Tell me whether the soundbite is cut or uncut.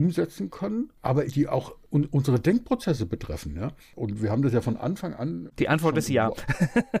cut